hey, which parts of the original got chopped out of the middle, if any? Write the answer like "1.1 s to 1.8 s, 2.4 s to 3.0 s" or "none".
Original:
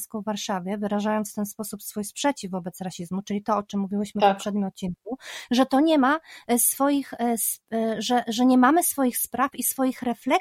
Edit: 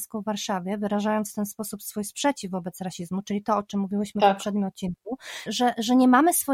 5.5 s to 8.0 s